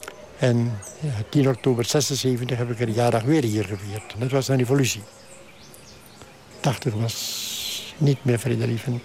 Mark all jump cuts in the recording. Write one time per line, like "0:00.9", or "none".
0:04.1
0:06.5